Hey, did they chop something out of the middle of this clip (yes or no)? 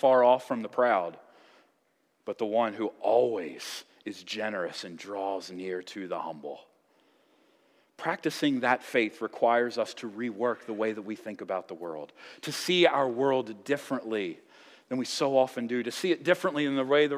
no